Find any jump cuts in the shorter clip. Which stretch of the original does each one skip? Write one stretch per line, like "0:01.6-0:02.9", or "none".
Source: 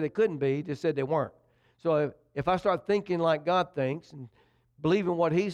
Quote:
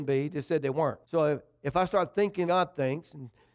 0:01.4-0:01.7
0:03.2-0:03.4